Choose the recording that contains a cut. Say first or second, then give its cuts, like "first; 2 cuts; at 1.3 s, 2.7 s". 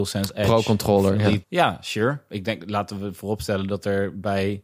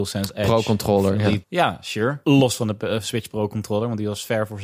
second; 1 cut; at 2.2 s